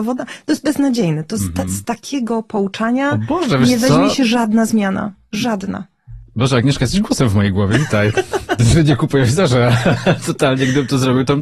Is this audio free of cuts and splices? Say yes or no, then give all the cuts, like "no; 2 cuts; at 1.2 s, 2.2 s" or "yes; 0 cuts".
yes; 0 cuts